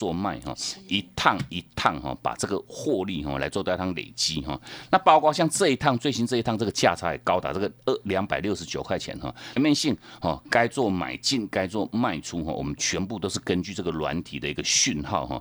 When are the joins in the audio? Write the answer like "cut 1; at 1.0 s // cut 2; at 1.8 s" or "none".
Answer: cut 1; at 9.6 s